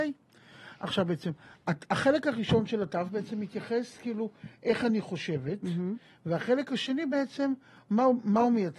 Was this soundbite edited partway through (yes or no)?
no